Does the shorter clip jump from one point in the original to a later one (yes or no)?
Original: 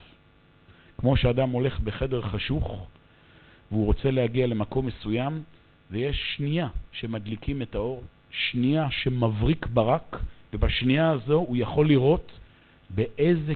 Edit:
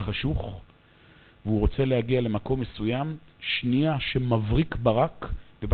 yes